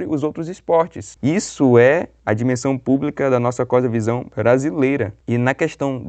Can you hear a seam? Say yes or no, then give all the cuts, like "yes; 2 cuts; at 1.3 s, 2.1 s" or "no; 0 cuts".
yes; 1 cut; at 1.2 s